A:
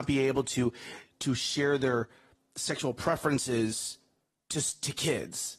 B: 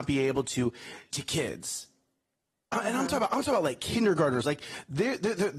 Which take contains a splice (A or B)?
B